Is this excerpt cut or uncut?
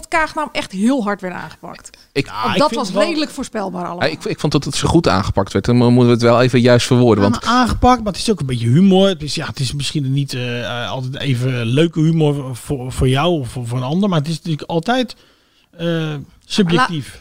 uncut